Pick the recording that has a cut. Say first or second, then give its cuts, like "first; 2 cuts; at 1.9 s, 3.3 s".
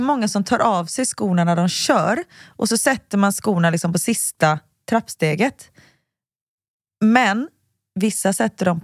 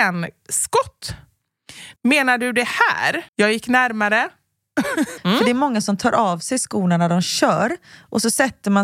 second; 3 cuts; at 2.0 s, 3.3 s, 5.2 s